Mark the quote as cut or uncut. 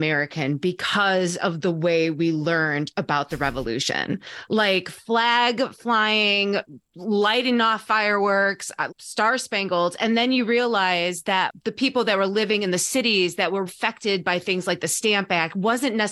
cut